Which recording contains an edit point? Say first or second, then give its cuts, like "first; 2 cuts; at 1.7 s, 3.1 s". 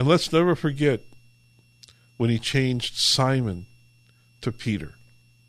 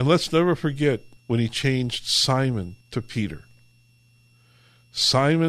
second; 2 cuts; at 1.2 s, 2.8 s